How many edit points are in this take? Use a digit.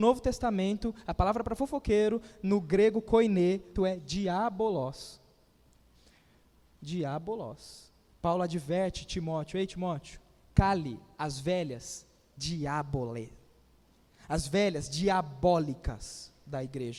2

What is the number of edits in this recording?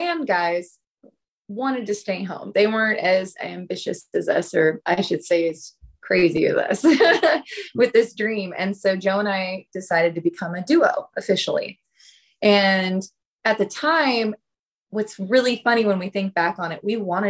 0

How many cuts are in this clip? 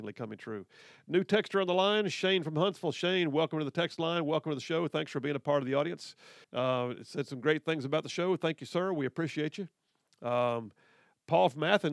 1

